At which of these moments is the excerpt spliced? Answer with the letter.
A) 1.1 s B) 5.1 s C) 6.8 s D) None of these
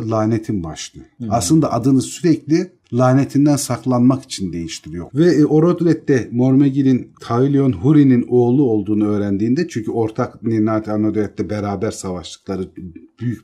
B